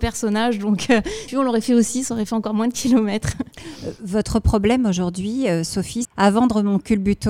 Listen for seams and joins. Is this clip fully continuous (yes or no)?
no